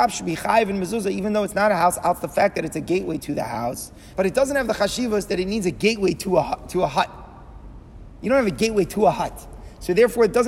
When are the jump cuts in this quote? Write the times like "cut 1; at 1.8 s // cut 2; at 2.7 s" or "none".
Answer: cut 1; at 4.1 s

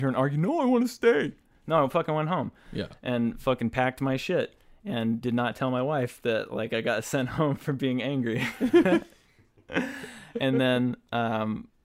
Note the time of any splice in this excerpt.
none

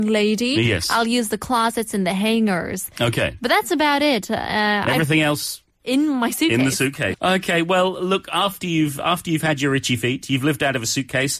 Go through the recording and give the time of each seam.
cut 1; at 7.1 s

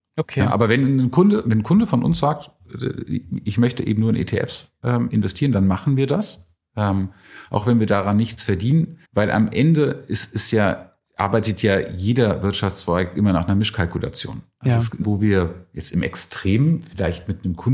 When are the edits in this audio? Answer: cut 1; at 9.0 s // cut 2; at 15.0 s

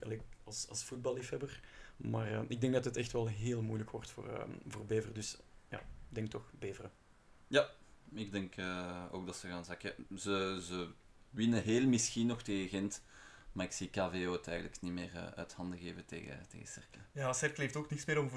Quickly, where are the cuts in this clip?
none

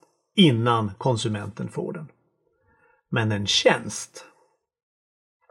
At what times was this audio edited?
none

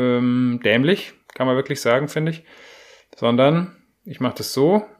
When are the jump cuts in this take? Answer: none

